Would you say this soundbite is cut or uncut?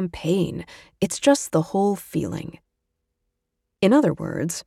uncut